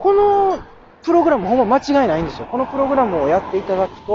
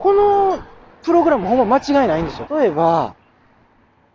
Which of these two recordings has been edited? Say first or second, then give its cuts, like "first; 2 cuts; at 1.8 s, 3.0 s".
second; 1 cut; at 2.5 s